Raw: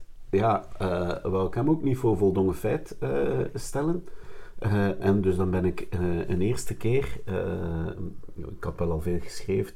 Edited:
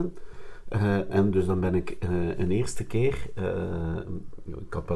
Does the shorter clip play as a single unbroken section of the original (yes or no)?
yes